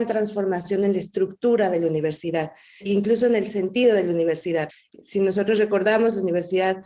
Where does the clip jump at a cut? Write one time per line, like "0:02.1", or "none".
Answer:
none